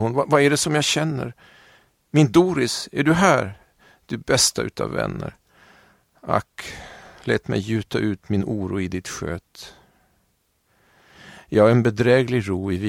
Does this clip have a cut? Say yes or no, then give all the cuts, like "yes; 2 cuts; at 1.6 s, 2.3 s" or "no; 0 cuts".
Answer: no; 0 cuts